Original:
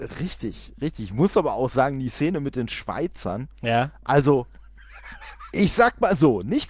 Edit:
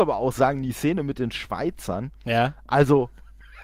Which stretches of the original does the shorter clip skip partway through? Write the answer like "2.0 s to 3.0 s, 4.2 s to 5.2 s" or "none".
none

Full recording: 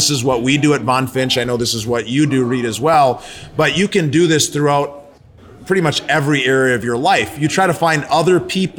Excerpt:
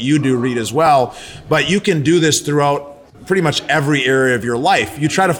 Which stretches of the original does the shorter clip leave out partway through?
5.2 s to 5.5 s

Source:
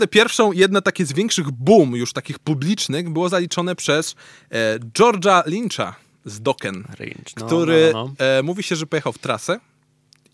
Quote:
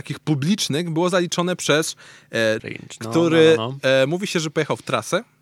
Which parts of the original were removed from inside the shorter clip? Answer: 4.8 s to 7.0 s

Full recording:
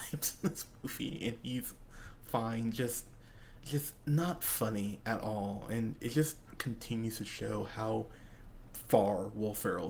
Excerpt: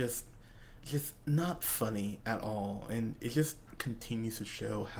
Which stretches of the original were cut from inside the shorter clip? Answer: none

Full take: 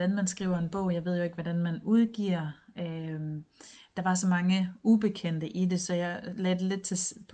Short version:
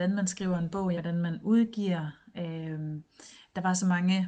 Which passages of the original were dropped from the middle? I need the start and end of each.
0.9 s to 1.4 s

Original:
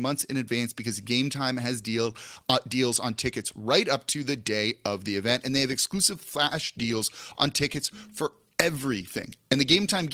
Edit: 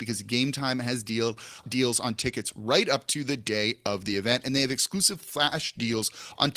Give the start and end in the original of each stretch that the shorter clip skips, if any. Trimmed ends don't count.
2.4 s to 2.6 s

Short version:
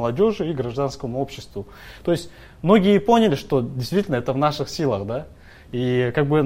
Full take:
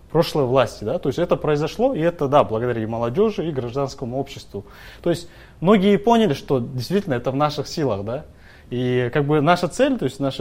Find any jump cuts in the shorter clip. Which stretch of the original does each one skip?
none

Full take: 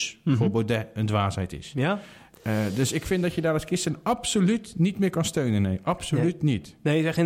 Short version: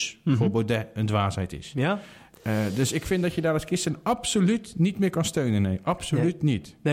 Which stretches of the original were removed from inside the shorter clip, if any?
none

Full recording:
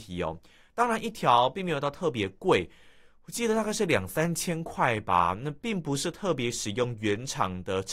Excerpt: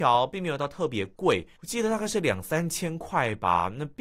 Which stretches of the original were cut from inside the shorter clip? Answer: 2.8 s to 3.2 s

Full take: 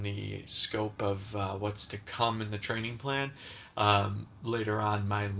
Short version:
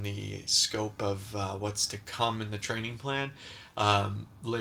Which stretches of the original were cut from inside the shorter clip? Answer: none

